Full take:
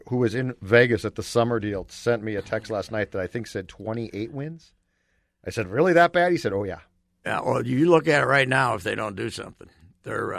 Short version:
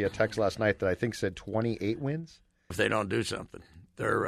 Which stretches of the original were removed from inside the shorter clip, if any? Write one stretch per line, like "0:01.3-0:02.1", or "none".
0:05.0-0:08.8